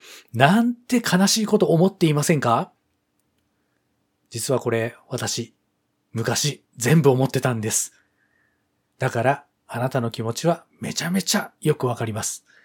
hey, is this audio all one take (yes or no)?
yes